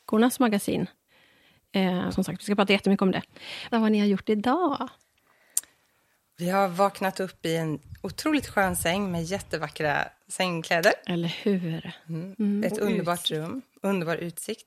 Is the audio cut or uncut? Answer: cut